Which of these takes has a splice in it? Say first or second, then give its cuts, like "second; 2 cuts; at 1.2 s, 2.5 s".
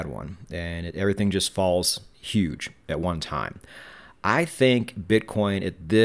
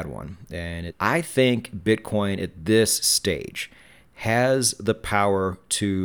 second; 1 cut; at 0.9 s